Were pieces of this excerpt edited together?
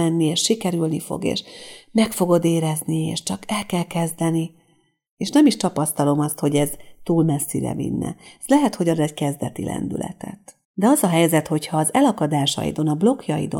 yes; 2 cuts; at 5.1 s, 10.6 s

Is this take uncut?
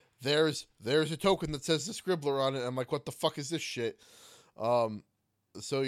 yes; 0 cuts

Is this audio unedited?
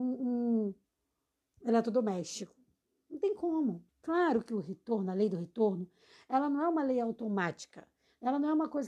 no; 2 cuts; at 1.6 s, 3.9 s

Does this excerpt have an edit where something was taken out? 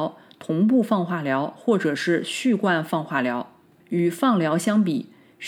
yes; 1 cut; at 3.8 s

